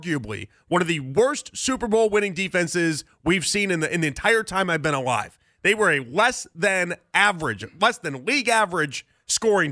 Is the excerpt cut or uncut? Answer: uncut